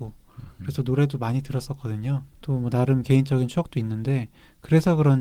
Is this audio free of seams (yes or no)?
no